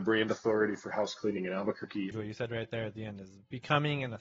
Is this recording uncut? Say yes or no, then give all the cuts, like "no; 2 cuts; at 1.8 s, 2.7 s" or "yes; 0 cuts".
no; 1 cut; at 2.1 s